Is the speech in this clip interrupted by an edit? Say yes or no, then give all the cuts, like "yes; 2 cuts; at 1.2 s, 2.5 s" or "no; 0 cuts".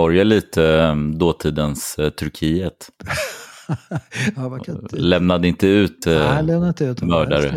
no; 0 cuts